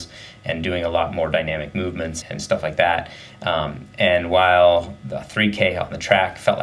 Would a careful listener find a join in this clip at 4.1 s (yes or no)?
no